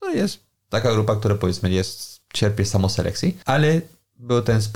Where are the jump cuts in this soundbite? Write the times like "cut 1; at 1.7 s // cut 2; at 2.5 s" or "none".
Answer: none